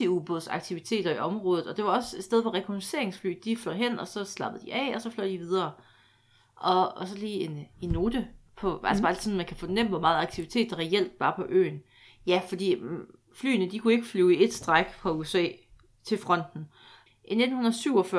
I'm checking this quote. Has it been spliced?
yes; 2 cuts; at 12.1 s, 17.1 s

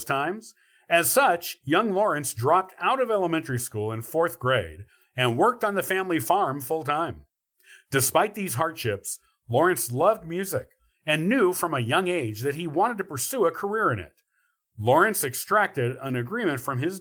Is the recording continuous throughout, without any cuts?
yes; 0 cuts

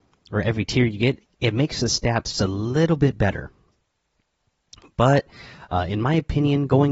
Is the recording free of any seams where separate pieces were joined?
no; 1 cut; at 2.3 s

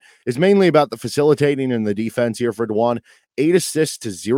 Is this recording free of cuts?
yes; 0 cuts

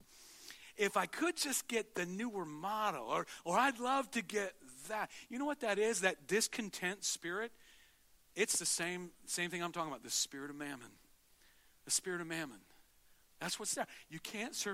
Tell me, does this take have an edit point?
no; 0 cuts

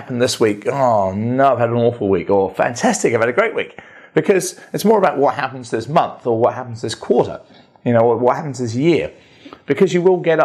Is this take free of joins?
yes; 0 cuts

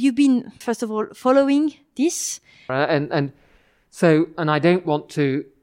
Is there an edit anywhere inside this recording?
yes; 1 cut; at 2.7 s

